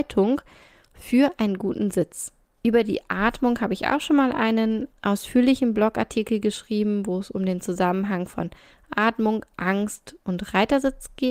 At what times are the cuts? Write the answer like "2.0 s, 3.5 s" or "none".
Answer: none